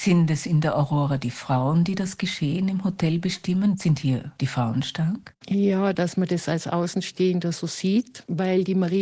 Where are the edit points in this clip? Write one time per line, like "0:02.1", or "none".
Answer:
0:05.9